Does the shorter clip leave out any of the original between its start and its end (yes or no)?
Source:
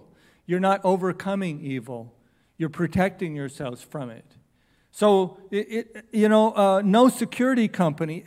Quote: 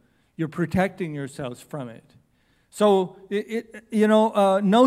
no